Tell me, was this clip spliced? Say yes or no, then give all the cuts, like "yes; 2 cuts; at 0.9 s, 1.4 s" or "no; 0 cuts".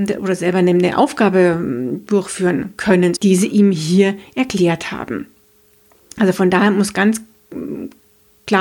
yes; 1 cut; at 3.2 s